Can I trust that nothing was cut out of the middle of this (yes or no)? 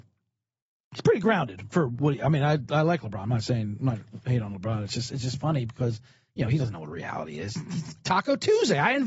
yes